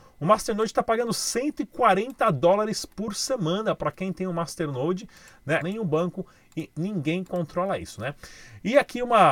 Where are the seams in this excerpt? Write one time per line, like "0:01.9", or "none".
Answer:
0:05.6